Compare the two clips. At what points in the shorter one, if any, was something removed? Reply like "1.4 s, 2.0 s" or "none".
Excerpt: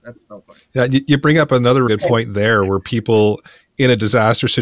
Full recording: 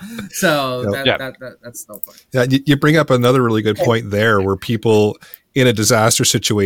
1.9 s

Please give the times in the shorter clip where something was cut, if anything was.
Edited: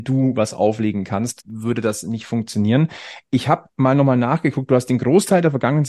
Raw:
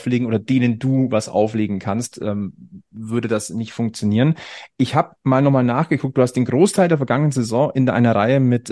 1.4 s

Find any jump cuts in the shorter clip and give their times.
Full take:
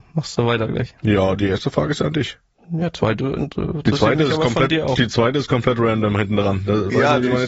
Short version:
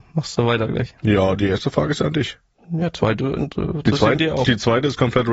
4.2 s

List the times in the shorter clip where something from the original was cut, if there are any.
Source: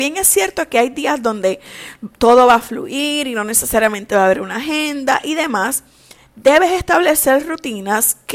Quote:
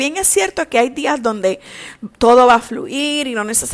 none

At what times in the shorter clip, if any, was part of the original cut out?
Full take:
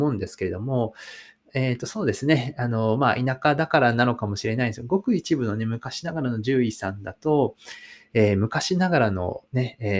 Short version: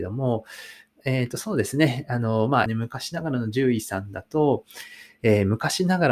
2.7 s

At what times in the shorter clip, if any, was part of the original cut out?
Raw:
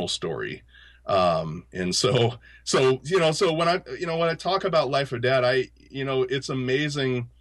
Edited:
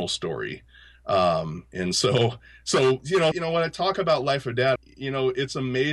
3.3 s, 4.8 s

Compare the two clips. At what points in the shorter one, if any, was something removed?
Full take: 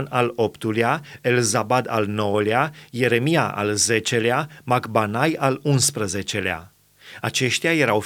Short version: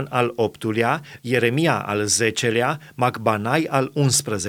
1.2 s

